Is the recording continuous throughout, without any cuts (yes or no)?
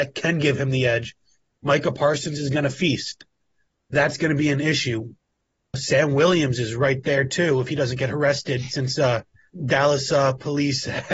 yes